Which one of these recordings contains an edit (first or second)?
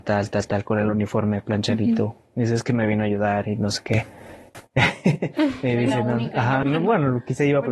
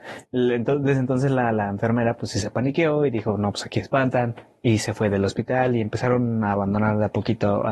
first